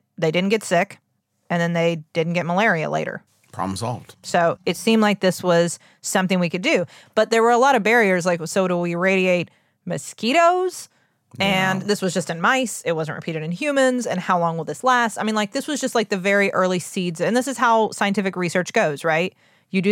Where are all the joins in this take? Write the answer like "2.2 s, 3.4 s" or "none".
none